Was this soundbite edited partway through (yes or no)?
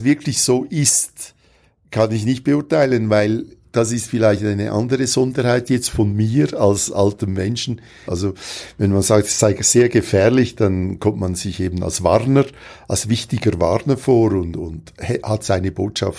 yes